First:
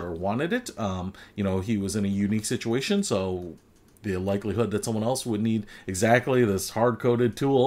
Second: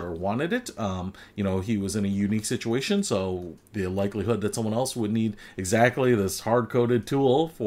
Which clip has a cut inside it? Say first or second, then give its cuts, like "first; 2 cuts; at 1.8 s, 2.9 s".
second; 1 cut; at 3.6 s